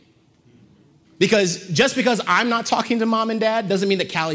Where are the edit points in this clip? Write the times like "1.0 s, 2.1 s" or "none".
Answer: 1.0 s